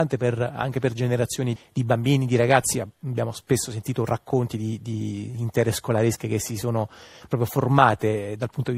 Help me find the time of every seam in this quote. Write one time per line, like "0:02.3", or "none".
0:01.6

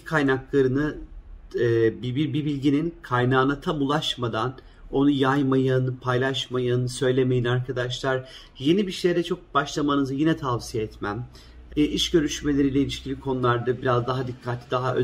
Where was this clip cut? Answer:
0:11.7

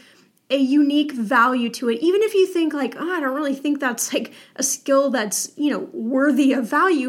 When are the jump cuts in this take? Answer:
none

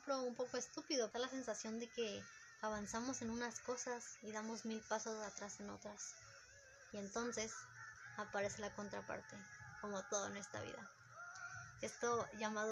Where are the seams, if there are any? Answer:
0:01.1
0:06.9

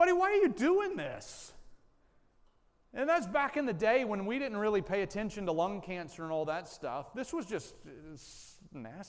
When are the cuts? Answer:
none

